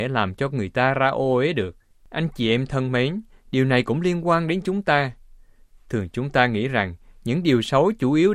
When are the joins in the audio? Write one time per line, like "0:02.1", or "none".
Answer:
0:01.9